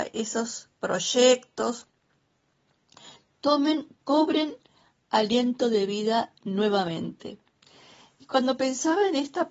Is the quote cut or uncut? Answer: uncut